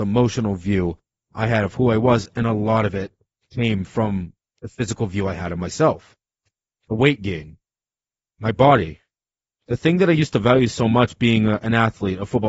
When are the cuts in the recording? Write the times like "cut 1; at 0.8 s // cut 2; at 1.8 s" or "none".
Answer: none